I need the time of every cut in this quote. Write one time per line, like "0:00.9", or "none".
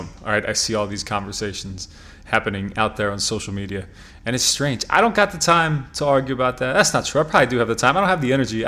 none

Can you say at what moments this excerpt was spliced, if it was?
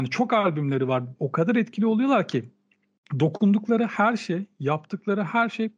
0:01.2

